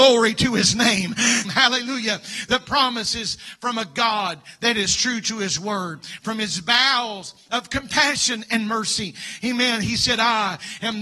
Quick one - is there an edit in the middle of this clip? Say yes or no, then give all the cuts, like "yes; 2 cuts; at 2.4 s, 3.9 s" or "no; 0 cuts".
yes; 1 cut; at 1.4 s